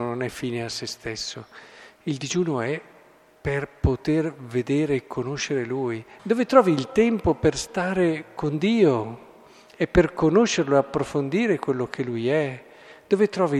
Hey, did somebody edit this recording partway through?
yes; 1 cut; at 6.2 s

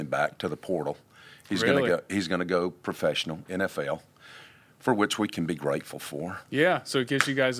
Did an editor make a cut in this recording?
no; 0 cuts

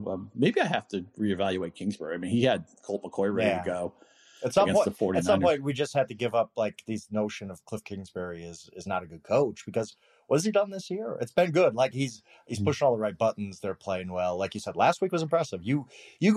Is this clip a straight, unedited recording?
yes; 0 cuts

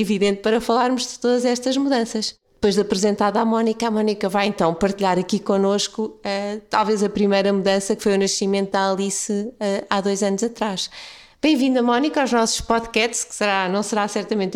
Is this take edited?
no; 0 cuts

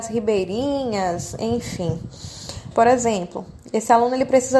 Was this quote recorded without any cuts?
no; 1 cut; at 2.7 s

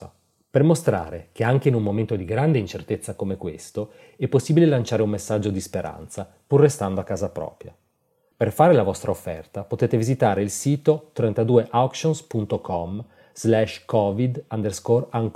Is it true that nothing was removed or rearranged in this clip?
no; 1 cut; at 8.3 s

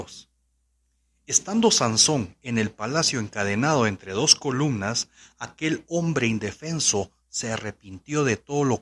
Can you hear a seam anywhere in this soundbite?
no; 0 cuts

